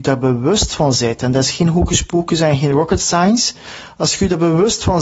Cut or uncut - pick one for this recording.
uncut